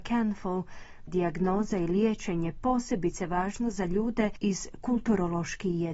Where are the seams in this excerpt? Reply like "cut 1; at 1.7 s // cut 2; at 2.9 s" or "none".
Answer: cut 1; at 1.1 s